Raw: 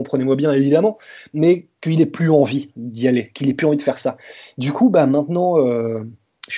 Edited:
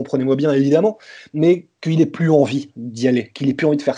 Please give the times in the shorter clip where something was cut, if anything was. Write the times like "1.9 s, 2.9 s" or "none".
none